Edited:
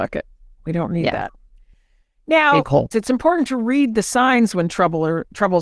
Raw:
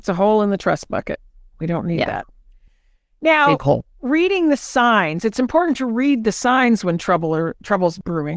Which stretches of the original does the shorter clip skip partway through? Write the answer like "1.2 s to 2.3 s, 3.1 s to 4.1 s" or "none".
3.9 s to 5.2 s